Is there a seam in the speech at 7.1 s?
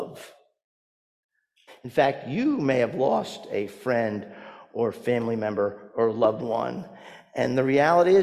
no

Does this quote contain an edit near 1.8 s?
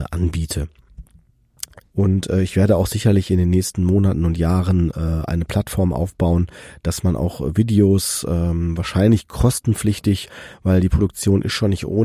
yes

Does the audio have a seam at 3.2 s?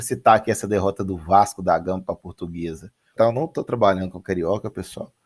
yes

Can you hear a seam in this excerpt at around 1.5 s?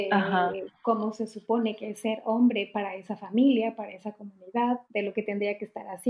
no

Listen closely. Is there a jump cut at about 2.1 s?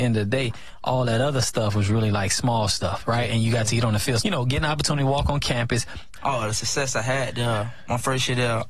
no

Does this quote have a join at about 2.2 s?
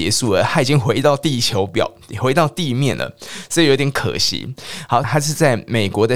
no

